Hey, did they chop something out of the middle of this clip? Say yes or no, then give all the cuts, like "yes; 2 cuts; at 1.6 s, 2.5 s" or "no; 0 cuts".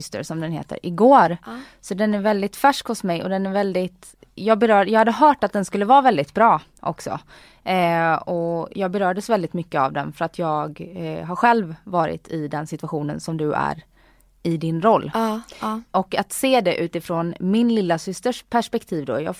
no; 0 cuts